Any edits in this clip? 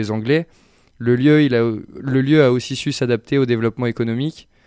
no; 0 cuts

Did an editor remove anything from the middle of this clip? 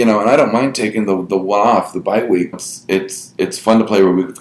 yes; 1 cut; at 2.5 s

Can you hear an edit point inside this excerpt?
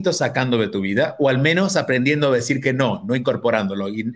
no; 0 cuts

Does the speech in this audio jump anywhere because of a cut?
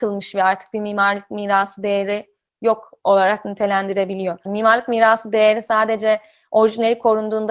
yes; 1 cut; at 4.5 s

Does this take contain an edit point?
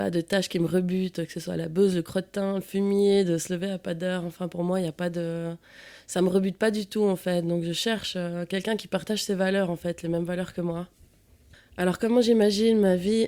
no; 0 cuts

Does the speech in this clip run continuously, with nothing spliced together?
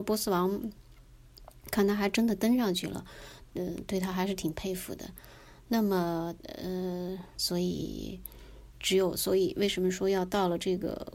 no; 2 cuts; at 7.3 s, 8.7 s

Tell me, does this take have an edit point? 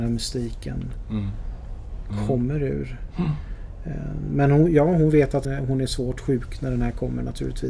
yes; 1 cut; at 5.4 s

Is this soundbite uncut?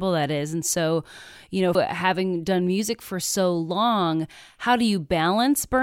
no; 1 cut; at 1.8 s

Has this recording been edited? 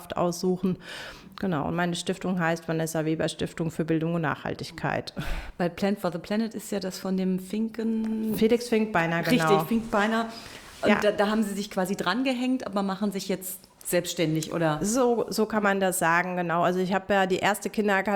no; 0 cuts

